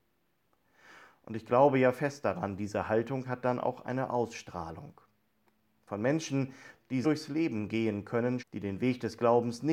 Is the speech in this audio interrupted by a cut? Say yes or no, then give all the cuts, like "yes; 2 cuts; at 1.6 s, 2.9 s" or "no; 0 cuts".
yes; 2 cuts; at 7.0 s, 8.4 s